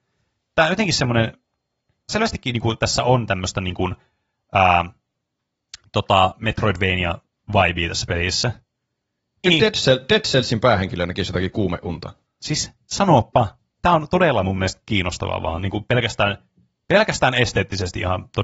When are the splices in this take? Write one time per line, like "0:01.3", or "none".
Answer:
0:02.1
0:09.4
0:12.2

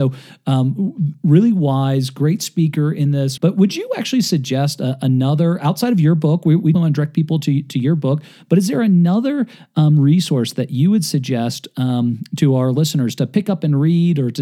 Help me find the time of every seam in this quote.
0:03.4
0:06.7

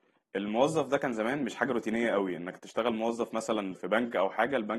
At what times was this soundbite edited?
0:03.8

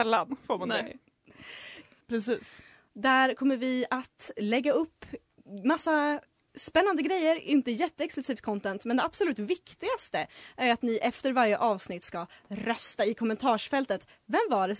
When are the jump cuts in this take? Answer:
0:02.0

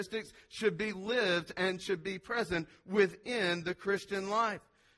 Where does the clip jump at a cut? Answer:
none

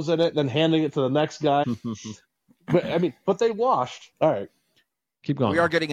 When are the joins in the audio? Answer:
0:01.6
0:04.1

